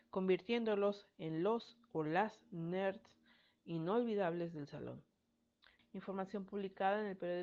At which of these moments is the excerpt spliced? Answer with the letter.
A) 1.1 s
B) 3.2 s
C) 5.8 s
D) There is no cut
C